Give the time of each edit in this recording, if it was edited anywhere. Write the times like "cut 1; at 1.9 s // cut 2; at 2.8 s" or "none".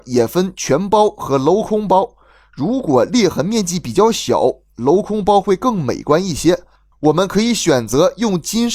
cut 1; at 6.9 s